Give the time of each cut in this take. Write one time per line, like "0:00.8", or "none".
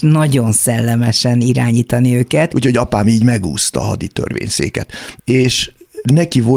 0:02.5
0:05.2